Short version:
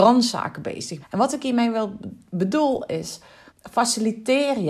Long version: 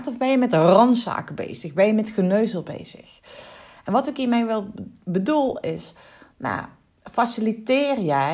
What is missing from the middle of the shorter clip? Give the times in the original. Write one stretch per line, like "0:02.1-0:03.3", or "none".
0:01.7-0:03.7
0:06.2-0:06.9